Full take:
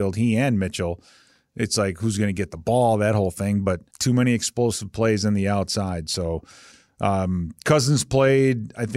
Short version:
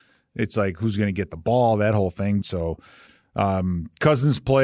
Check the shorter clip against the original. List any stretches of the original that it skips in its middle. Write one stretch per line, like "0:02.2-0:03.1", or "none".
0:03.6-0:06.1